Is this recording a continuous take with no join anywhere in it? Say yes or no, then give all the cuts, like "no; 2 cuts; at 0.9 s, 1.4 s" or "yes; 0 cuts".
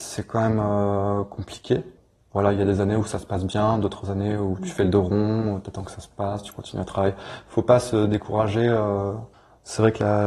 yes; 0 cuts